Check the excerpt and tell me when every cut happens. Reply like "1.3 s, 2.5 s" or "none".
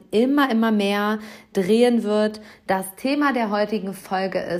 none